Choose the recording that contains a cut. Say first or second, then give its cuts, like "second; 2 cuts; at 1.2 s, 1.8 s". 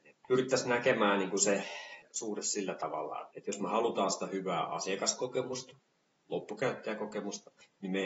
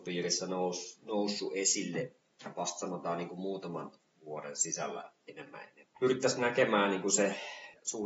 first; 1 cut; at 3.3 s